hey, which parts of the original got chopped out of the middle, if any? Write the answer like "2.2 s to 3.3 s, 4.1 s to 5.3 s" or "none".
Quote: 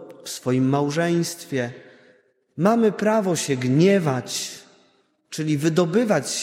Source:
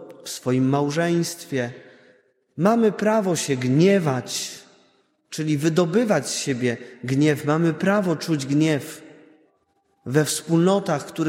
none

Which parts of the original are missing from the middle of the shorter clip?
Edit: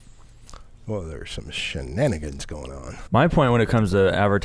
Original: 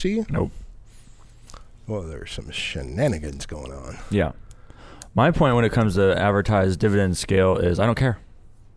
4.1 s to 5.1 s

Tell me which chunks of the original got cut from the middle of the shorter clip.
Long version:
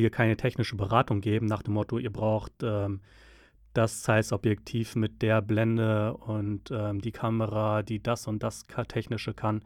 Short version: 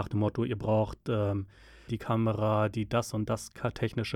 3.4 s to 7.0 s

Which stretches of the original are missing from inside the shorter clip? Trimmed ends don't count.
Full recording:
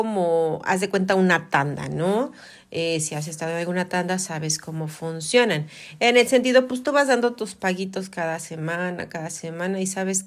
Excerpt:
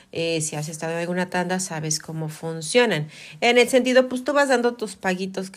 none

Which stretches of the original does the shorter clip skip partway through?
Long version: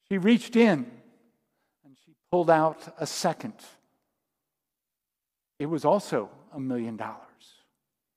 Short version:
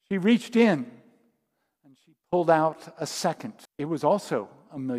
3.6 s to 5.5 s

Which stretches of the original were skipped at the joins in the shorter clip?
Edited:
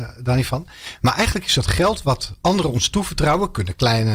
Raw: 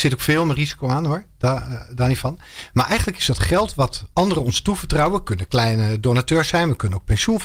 none

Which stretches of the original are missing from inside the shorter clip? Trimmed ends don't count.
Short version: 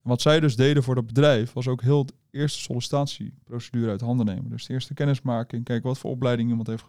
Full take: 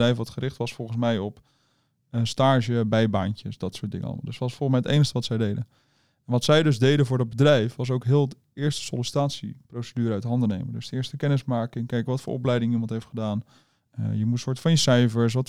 none

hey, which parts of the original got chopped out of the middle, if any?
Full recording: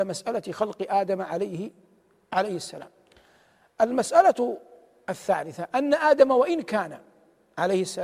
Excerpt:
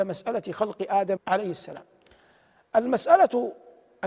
1.2 s to 2.2 s

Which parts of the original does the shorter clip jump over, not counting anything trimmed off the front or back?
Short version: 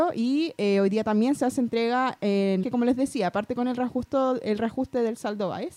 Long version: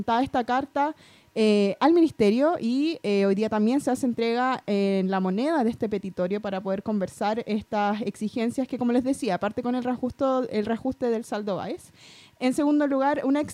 5.1 s to 8.7 s

